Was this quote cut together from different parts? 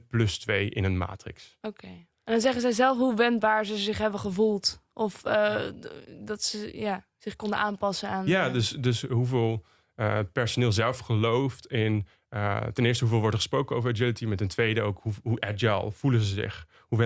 no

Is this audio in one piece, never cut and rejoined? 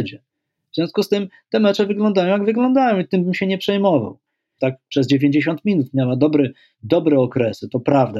no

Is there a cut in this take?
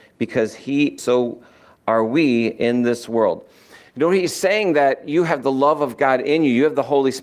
yes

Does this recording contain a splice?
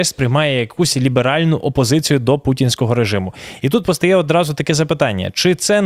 no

